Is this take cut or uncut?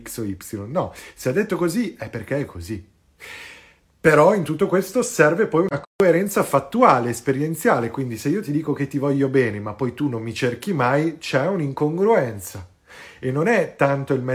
uncut